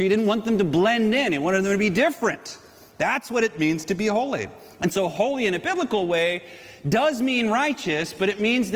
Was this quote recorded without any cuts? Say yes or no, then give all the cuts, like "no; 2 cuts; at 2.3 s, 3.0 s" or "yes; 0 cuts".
yes; 0 cuts